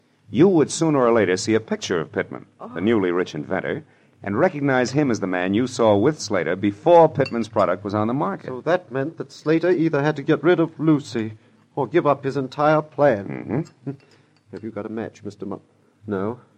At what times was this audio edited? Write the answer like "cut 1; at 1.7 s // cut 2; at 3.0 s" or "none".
none